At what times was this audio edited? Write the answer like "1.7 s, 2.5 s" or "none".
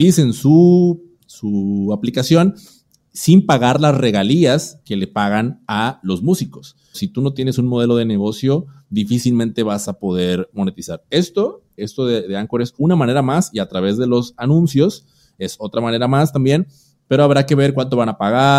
6.9 s, 11.8 s